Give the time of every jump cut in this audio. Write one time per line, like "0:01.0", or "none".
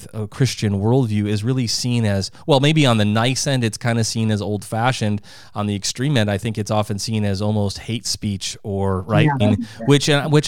0:09.4